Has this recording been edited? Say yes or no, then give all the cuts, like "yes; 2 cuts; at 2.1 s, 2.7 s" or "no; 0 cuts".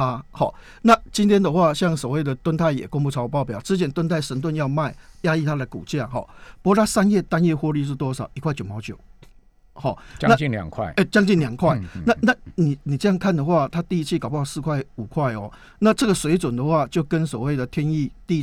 no; 0 cuts